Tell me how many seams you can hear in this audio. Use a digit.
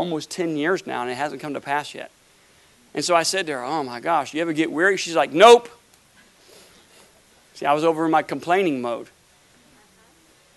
0